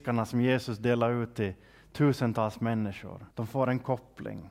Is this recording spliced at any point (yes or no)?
yes